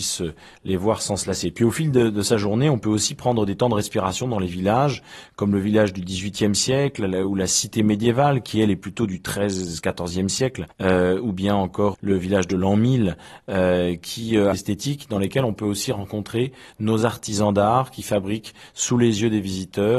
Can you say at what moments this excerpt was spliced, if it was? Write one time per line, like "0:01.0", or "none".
0:10.7
0:11.9
0:14.5